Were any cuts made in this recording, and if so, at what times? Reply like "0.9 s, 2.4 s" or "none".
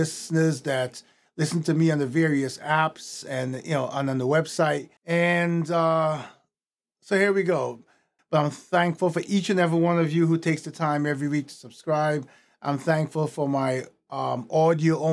5.0 s, 8.2 s

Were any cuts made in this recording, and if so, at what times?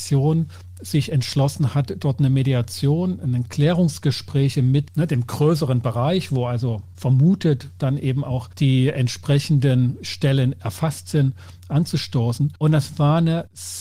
none

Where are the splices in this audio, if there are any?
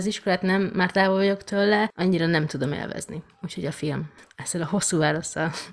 none

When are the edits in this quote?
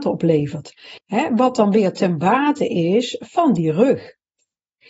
1.0 s

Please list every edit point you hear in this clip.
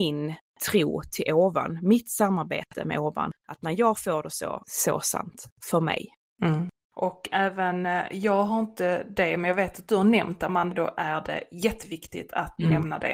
4.6 s, 10.7 s

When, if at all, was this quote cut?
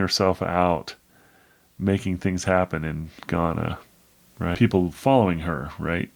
4.5 s

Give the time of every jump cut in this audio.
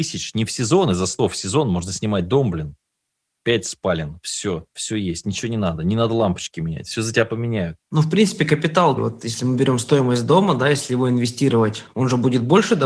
7.8 s, 9.0 s

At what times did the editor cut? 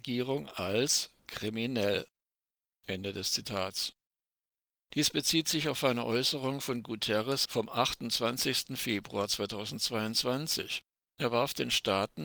none

